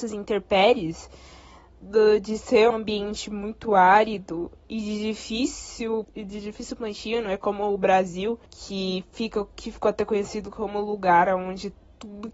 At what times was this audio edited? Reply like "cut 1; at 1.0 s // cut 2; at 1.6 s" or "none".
cut 1; at 2.7 s // cut 2; at 6.0 s // cut 3; at 8.5 s